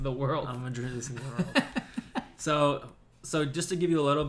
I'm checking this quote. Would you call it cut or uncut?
uncut